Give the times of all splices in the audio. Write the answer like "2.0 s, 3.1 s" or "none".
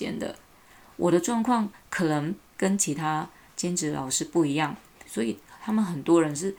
5.1 s